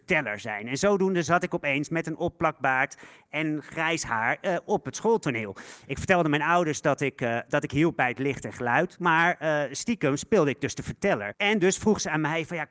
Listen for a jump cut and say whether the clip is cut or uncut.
cut